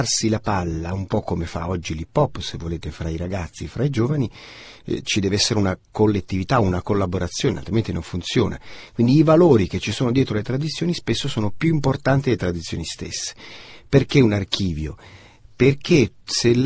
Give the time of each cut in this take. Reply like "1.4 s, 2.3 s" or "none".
none